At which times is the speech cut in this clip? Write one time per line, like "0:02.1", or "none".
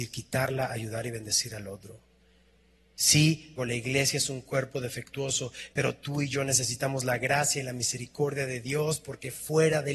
0:03.6
0:05.7